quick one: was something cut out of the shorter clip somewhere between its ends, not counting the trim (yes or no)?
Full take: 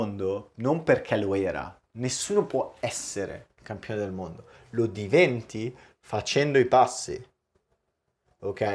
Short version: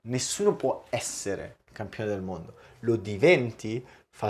no